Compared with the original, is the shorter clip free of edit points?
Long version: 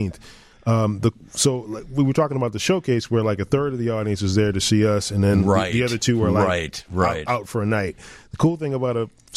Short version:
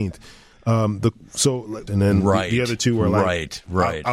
no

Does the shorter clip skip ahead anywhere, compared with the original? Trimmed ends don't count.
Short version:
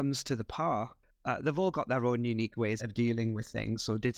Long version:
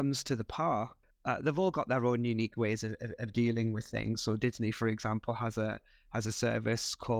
yes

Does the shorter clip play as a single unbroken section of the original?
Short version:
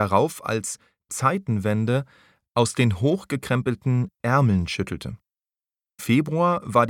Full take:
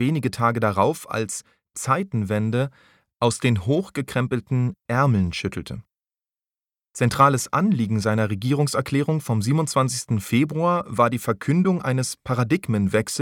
no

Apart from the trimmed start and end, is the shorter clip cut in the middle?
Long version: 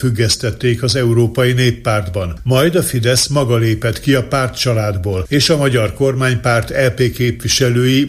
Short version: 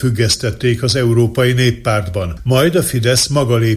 no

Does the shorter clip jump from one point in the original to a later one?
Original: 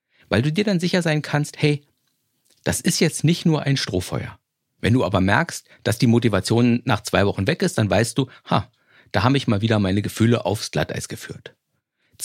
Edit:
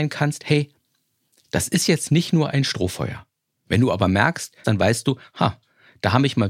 yes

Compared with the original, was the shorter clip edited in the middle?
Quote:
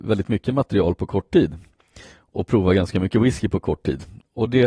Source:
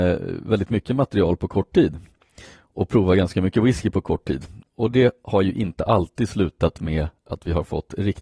no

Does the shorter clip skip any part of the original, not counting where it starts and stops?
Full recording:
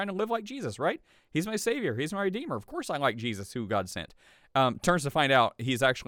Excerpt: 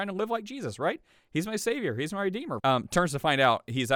yes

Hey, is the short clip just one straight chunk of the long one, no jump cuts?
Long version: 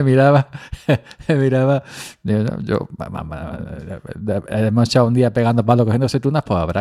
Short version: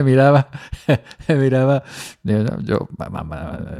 yes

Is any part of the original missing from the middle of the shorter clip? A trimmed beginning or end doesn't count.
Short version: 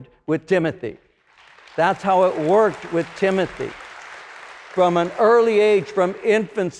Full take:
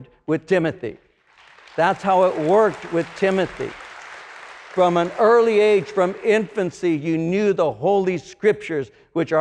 no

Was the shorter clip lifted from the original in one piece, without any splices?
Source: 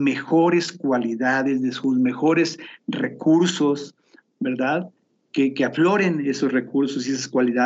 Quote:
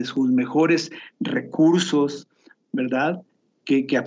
yes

